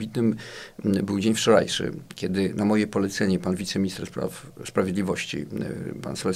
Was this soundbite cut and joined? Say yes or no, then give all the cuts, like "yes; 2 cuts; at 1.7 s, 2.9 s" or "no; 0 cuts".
no; 0 cuts